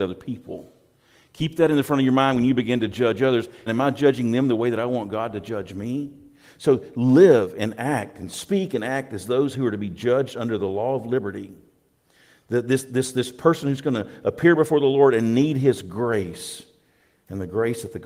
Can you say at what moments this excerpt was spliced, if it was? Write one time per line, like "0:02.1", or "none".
0:03.7